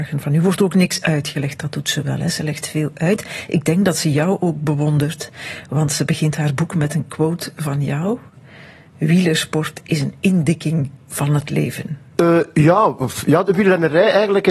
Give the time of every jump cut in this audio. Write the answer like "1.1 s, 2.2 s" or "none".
12.2 s

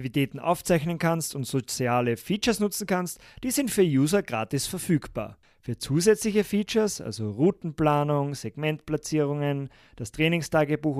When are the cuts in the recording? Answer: none

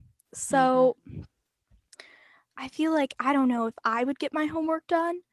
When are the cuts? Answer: none

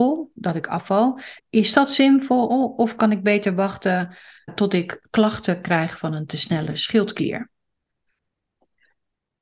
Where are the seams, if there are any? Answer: 1.4 s, 4.5 s

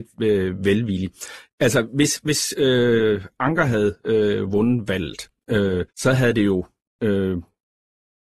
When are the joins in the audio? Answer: 5.9 s

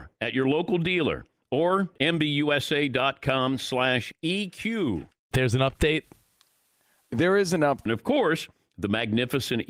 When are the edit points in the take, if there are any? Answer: 5.3 s, 7.9 s

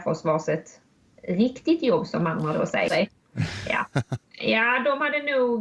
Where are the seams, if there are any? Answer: 2.9 s, 4.2 s

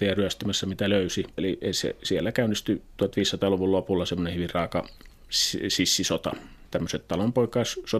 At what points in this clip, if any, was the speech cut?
1.4 s, 6.7 s

